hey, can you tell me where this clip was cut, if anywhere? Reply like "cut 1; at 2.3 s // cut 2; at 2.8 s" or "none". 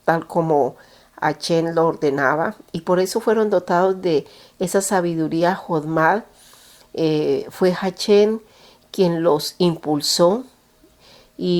none